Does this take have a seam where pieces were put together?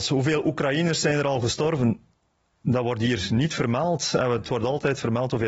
no; 0 cuts

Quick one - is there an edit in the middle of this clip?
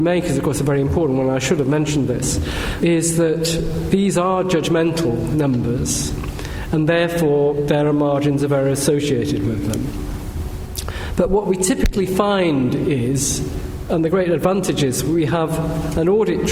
yes; 1 cut; at 2.8 s

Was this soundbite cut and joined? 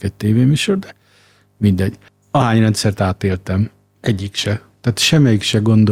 yes; 1 cut; at 2.1 s

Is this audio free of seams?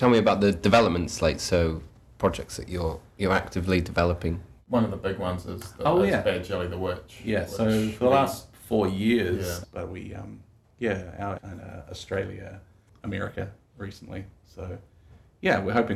no; 3 cuts; at 9.6 s, 11.4 s, 12.9 s

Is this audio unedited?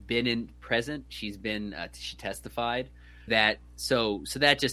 no; 1 cut; at 3.3 s

